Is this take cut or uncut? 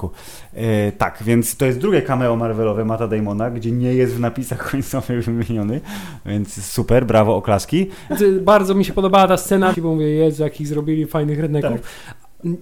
cut